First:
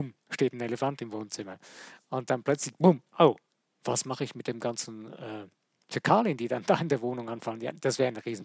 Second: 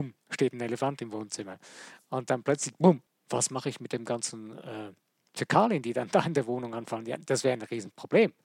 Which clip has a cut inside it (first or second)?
second